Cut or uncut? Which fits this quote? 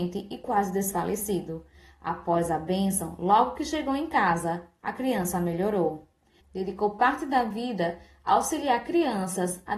cut